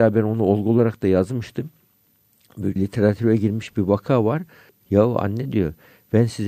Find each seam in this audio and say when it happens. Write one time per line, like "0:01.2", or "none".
0:02.8